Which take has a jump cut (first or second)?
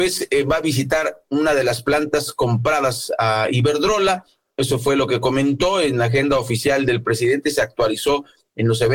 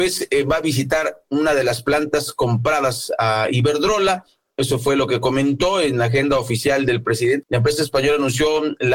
second